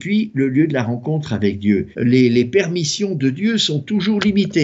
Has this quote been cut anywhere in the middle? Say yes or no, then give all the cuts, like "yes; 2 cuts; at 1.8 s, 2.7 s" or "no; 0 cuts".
yes; 1 cut; at 1.9 s